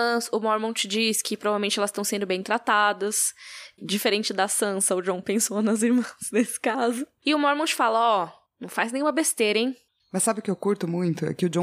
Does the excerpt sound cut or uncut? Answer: uncut